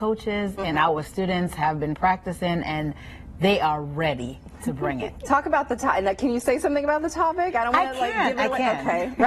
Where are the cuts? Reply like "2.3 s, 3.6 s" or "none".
none